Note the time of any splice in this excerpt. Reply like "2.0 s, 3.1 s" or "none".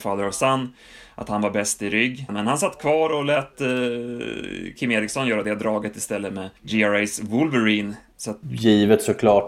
2.3 s, 6.6 s, 8.4 s